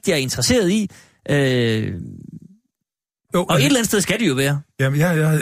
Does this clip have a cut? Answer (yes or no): no